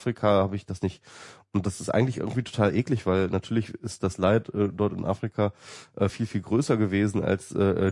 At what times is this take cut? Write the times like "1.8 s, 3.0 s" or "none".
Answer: none